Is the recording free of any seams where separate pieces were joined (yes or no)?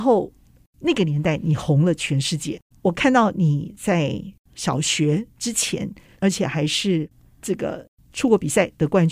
no